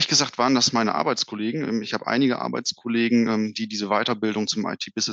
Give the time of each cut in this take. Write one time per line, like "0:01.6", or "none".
none